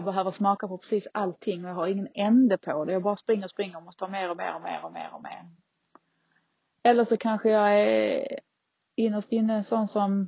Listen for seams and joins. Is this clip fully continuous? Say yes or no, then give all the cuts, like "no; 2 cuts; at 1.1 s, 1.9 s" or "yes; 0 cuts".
no; 1 cut; at 3.5 s